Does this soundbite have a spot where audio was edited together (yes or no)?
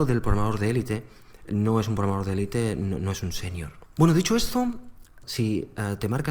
yes